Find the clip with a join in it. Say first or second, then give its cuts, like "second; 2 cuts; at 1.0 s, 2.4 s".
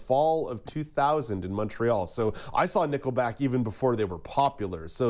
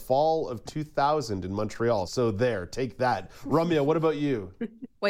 second; 1 cut; at 2.1 s